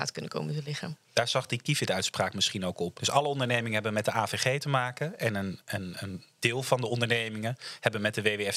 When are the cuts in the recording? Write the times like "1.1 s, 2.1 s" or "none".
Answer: 3.0 s